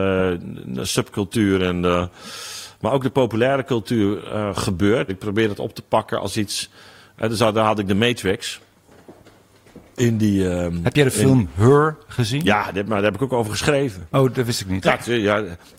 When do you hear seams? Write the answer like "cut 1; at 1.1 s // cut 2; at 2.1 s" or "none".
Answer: cut 1; at 5.1 s // cut 2; at 14.8 s